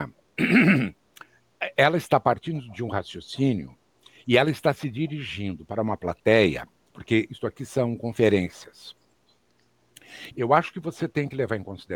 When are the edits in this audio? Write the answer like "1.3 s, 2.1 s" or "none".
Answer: 10.3 s